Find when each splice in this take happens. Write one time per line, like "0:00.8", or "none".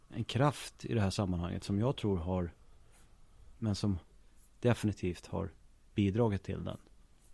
0:03.6